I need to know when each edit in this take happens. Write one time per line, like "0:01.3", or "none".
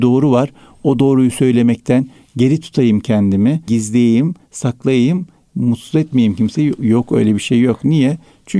0:03.7